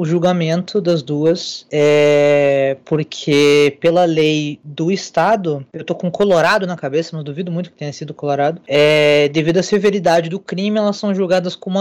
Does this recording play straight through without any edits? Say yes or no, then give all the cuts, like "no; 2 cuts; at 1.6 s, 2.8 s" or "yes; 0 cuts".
no; 1 cut; at 5.7 s